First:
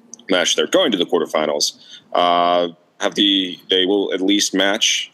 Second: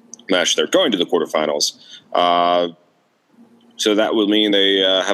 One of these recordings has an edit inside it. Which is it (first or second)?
first